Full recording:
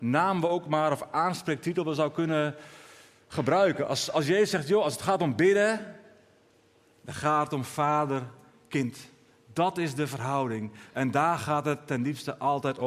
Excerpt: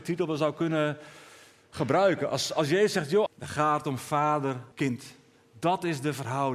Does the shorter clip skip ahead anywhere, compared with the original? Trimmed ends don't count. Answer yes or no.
yes